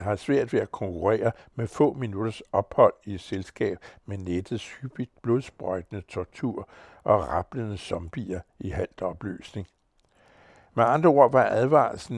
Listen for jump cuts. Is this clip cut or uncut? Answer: uncut